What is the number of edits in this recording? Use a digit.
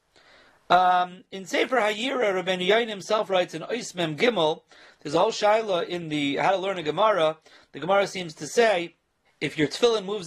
1